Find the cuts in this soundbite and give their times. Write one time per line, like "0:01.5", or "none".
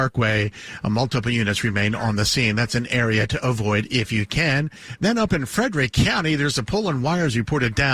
none